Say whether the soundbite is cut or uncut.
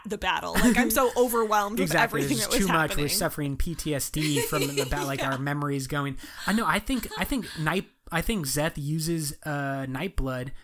uncut